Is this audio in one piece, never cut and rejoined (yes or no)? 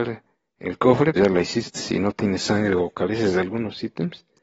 no